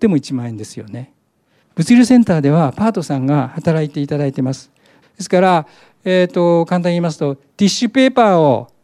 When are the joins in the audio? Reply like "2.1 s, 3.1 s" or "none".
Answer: 1.6 s, 5.0 s